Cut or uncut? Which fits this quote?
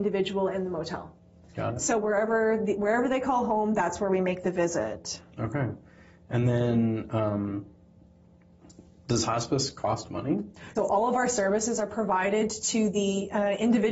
cut